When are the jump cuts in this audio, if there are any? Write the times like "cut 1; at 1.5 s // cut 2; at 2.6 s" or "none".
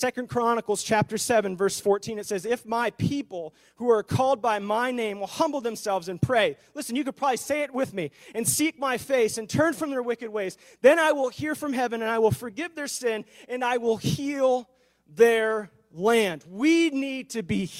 none

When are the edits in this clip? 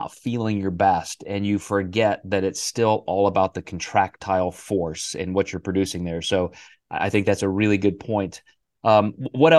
none

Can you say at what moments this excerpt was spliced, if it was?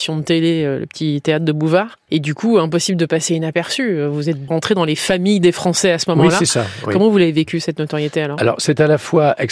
none

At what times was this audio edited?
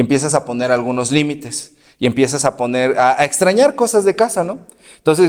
none

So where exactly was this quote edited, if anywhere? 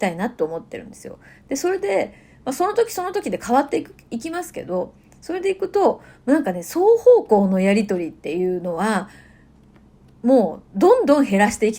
none

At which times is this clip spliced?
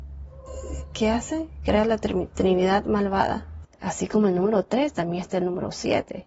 cut 1; at 3.6 s

